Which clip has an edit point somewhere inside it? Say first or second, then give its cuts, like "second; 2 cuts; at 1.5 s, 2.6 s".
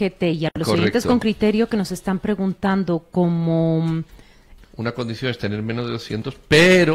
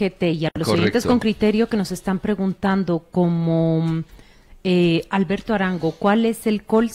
first; 1 cut; at 4.6 s